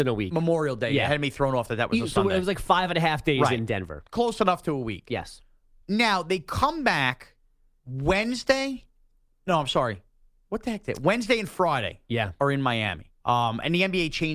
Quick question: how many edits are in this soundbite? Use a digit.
1